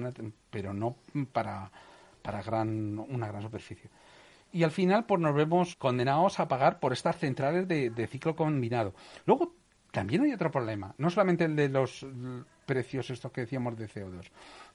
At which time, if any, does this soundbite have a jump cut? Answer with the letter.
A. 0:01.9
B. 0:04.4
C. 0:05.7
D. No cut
C